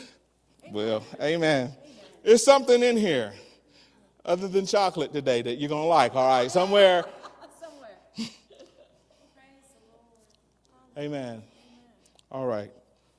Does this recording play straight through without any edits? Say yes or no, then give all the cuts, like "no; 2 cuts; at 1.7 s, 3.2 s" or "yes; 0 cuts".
yes; 0 cuts